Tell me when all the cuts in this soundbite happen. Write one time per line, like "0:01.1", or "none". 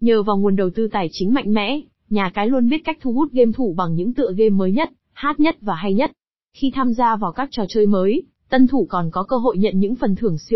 none

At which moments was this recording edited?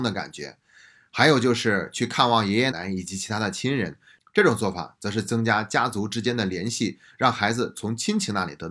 0:02.7

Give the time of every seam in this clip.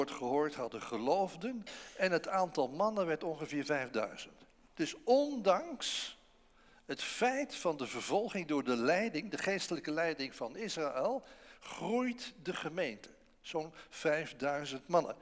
none

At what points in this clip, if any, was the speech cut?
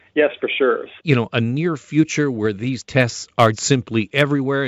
0:01.0
0:03.5

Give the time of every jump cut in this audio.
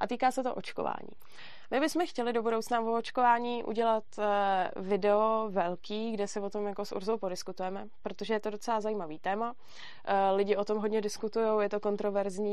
none

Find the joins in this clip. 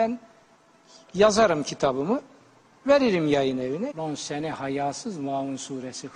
0:03.9

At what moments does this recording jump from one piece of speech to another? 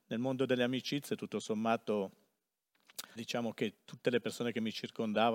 0:03.2

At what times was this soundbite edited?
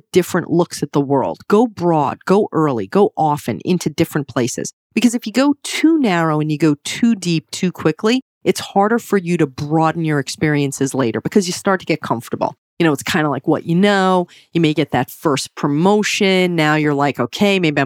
none

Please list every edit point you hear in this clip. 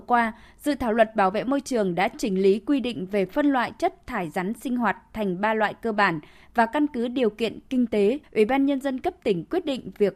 0:08.2

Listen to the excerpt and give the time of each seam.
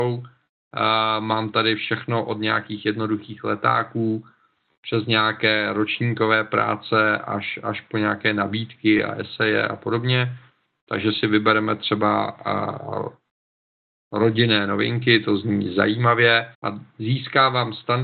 0:16.5

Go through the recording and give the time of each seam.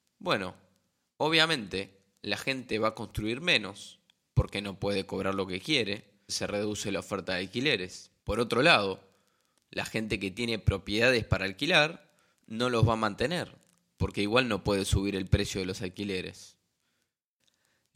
0:06.3
0:08.2

